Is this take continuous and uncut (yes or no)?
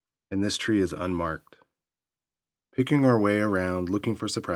no